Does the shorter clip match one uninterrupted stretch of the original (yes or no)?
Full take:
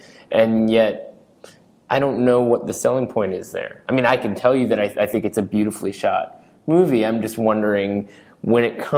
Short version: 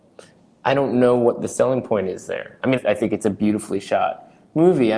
no